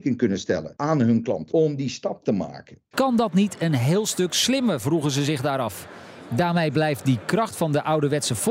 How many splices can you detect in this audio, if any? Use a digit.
3